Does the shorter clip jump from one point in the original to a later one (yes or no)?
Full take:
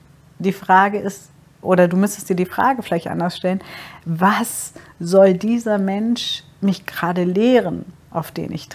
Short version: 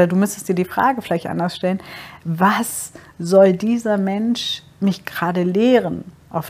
no